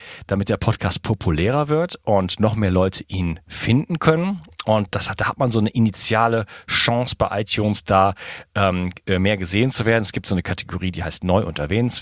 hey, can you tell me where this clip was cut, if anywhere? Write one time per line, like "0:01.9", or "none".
none